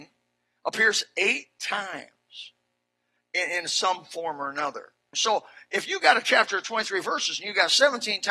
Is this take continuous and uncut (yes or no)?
no